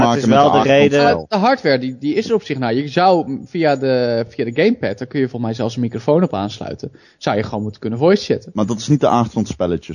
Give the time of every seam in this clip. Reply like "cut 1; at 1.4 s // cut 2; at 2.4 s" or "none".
none